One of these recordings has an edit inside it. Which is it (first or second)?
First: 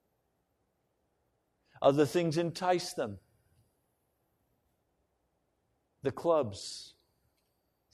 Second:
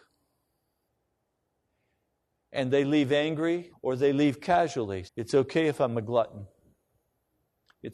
second